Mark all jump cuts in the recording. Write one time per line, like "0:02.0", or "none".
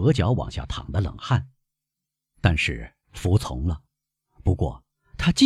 none